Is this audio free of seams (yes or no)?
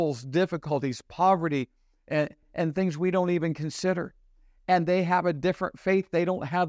no